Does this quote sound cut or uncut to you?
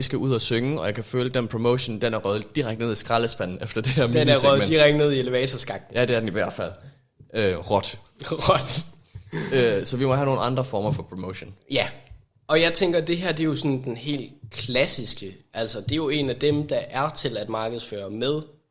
uncut